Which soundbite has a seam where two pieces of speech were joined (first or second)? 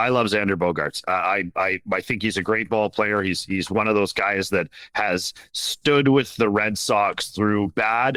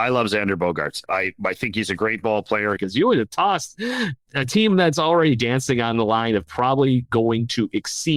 second